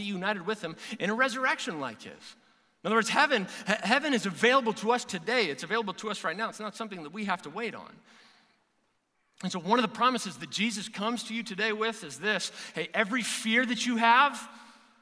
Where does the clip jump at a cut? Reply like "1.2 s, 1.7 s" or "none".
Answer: none